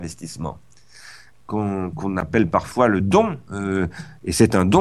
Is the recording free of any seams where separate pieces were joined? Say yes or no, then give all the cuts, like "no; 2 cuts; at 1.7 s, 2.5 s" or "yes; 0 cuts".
no; 1 cut; at 1.9 s